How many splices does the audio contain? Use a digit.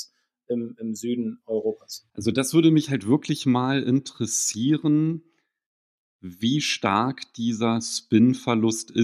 1